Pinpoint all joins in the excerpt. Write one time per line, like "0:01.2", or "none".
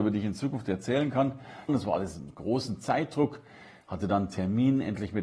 0:01.7